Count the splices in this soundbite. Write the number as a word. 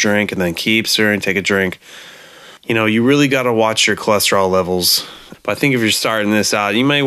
two